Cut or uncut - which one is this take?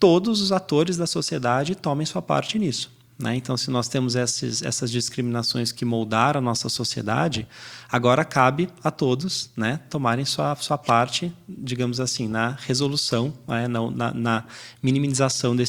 uncut